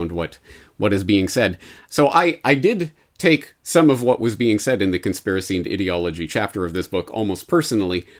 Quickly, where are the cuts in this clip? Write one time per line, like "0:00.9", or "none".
none